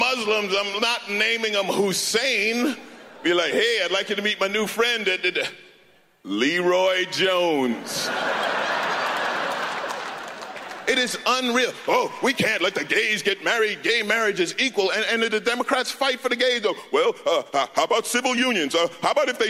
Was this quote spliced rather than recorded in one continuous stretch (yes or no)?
no